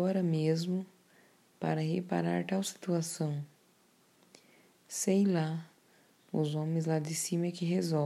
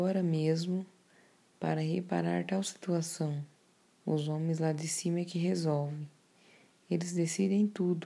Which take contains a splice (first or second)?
second